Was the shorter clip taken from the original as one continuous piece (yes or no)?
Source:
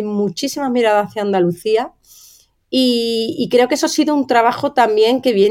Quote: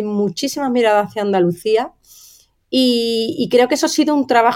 yes